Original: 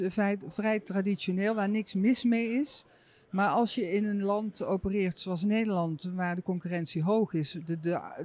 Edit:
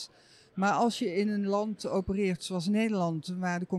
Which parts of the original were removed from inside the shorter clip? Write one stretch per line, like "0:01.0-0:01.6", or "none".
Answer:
none